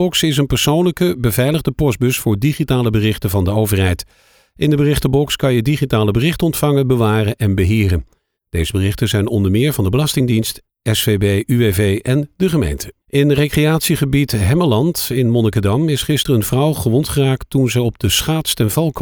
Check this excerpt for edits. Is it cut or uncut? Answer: cut